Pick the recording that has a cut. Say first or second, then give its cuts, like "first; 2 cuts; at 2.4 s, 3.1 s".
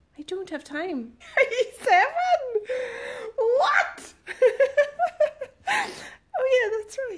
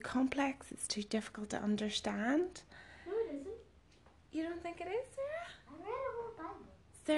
first; 1 cut; at 1.2 s